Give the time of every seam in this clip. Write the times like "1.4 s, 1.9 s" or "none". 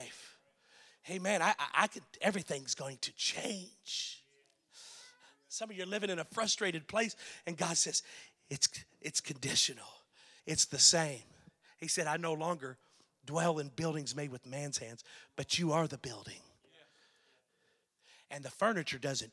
10.4 s